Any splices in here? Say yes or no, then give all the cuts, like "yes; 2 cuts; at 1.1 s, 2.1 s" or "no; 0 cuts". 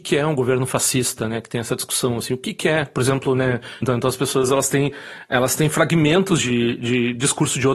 yes; 1 cut; at 3.8 s